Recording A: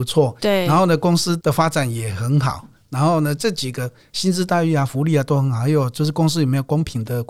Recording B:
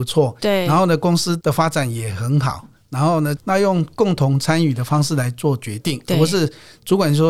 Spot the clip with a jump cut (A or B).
B